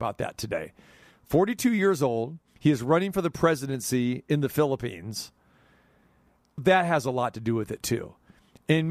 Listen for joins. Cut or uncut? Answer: cut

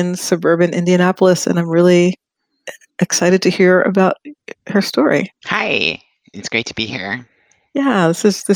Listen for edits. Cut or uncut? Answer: cut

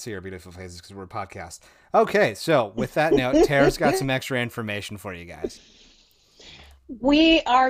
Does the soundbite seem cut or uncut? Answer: uncut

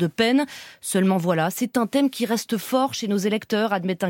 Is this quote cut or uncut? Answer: uncut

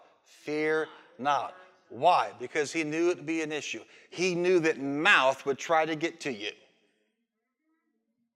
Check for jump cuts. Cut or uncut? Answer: uncut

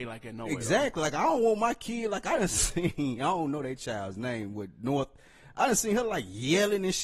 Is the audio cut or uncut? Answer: uncut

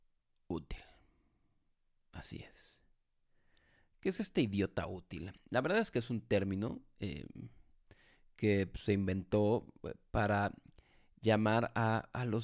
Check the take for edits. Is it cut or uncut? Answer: uncut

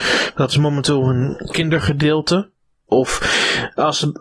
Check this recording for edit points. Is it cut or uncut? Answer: cut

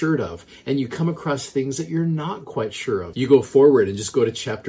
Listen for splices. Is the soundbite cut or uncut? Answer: cut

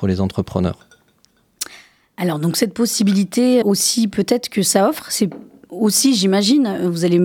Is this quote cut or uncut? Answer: cut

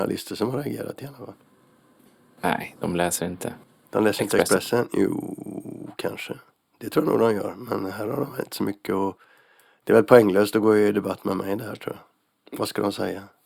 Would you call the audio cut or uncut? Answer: uncut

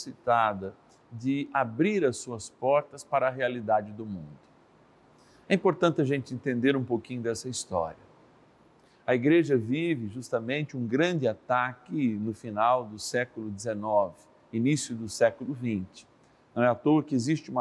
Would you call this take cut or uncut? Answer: uncut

